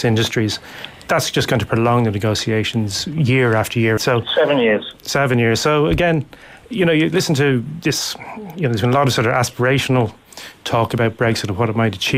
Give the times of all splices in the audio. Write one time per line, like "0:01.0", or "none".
0:04.0